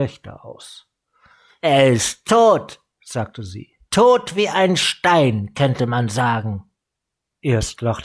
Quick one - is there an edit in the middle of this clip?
yes; 2 cuts; at 1.6 s, 3.8 s

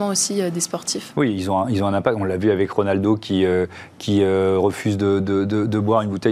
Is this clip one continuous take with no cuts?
no; 1 cut; at 1.1 s

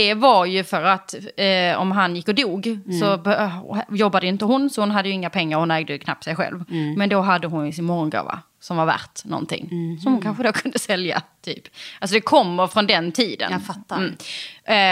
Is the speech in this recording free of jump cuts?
yes; 0 cuts

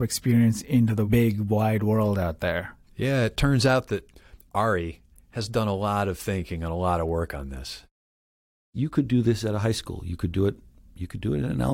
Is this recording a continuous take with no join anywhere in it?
yes; 0 cuts

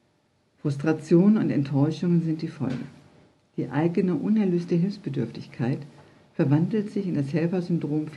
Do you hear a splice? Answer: no; 0 cuts

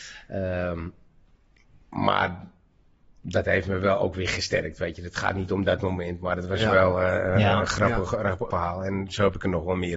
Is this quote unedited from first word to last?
no; 1 cut; at 8.5 s

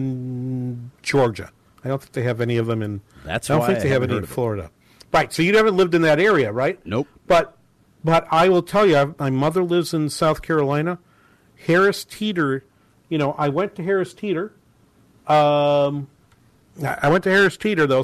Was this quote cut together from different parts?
no; 0 cuts

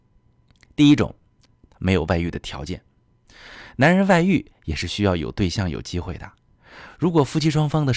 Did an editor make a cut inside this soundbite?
no; 0 cuts

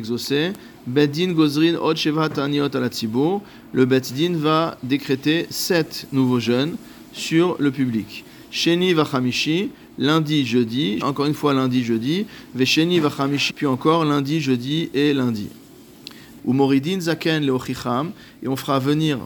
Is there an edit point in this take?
yes; 3 cuts; at 11.0 s, 13.5 s, 16.4 s

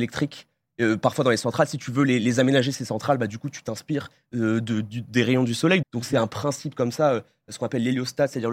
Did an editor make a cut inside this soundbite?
yes; 1 cut; at 5.8 s

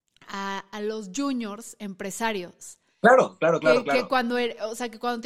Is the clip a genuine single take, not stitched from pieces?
yes; 0 cuts

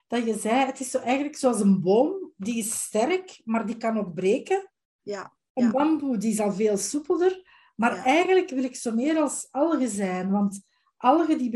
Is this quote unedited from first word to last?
yes; 0 cuts

